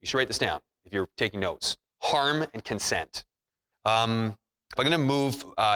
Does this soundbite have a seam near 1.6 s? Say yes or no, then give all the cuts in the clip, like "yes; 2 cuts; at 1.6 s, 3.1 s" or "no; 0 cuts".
no; 2 cuts; at 3.7 s, 4.8 s